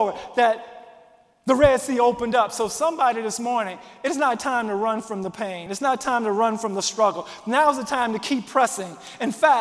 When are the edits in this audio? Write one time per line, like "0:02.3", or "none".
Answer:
none